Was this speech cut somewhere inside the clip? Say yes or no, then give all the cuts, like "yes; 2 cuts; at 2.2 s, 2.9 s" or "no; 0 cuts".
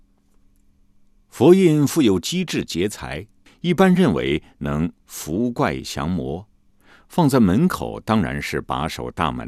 yes; 1 cut; at 3.5 s